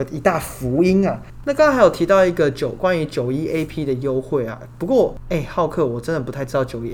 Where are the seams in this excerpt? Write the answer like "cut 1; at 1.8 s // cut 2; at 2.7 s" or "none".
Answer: cut 1; at 3.7 s